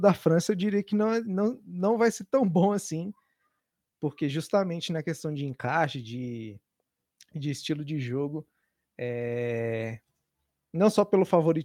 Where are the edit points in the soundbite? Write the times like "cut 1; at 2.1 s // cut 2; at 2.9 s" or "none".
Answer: none